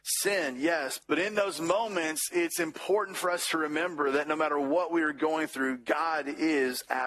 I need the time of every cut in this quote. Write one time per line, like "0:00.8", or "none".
0:01.0